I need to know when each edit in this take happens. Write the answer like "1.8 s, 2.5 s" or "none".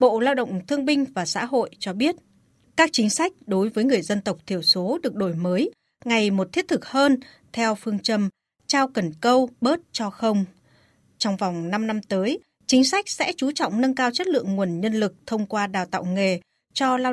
9.5 s